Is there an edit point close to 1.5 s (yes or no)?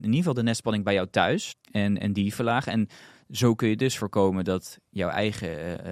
yes